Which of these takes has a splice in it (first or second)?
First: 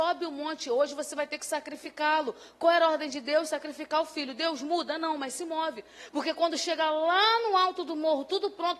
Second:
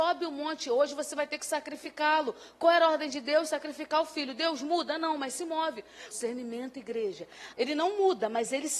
second